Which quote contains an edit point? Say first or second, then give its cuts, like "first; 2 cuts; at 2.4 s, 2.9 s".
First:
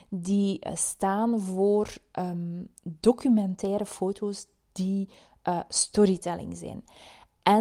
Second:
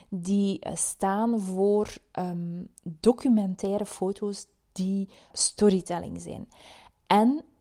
second; 1 cut; at 5.3 s